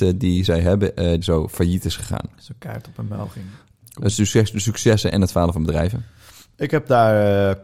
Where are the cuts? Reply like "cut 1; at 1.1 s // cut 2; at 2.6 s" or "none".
cut 1; at 1.2 s // cut 2; at 3.8 s